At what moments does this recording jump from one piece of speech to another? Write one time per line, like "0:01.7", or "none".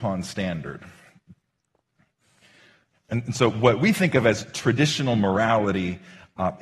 0:02.9